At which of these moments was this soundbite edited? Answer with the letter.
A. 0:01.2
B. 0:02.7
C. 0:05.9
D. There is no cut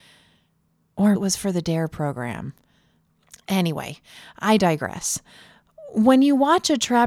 A